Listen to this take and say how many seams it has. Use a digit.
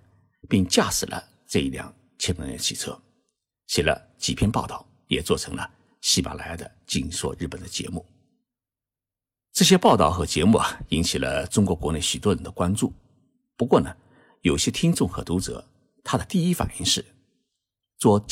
0